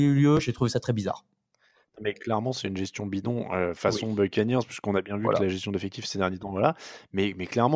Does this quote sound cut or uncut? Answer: uncut